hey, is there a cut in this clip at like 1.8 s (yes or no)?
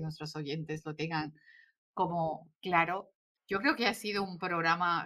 no